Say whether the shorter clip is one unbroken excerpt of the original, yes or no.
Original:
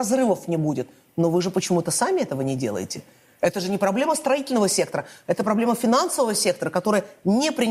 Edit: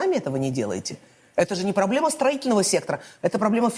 yes